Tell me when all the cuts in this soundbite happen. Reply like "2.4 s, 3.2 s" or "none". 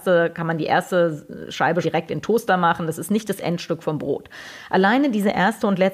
1.8 s